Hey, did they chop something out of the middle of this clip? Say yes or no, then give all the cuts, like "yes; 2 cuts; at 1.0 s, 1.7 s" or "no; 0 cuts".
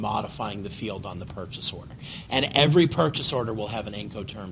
no; 0 cuts